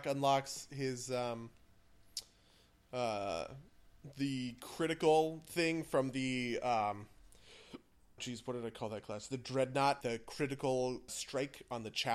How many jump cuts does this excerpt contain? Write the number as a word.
three